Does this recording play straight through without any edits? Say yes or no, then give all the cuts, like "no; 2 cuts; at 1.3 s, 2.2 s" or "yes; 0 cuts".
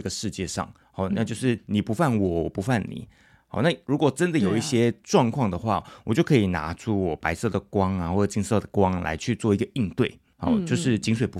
yes; 0 cuts